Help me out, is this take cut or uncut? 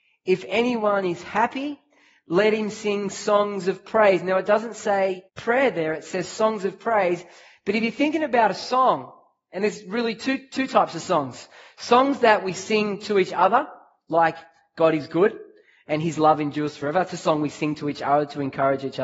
cut